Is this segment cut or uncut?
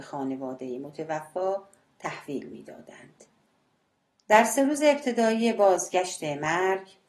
cut